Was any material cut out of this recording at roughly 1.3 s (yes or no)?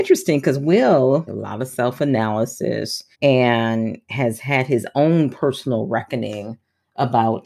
yes